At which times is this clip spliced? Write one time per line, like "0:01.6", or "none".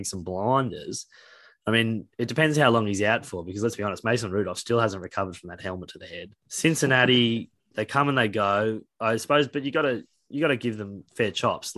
0:06.4
0:07.7